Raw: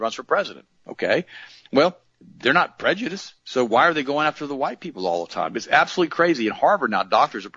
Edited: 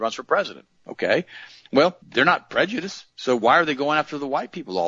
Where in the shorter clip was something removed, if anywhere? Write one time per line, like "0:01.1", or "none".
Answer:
0:02.0